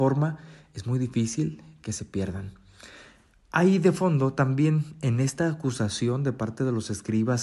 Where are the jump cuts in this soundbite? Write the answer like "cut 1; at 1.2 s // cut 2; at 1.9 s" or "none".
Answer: none